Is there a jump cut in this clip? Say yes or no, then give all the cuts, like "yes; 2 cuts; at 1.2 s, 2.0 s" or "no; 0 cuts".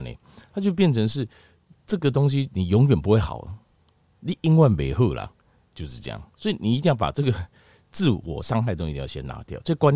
no; 0 cuts